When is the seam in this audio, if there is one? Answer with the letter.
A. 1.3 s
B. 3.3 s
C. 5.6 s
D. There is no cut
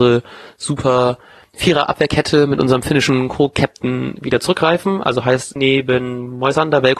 C